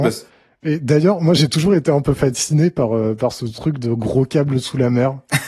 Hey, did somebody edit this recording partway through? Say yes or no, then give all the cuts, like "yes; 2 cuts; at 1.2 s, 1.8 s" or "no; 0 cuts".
no; 0 cuts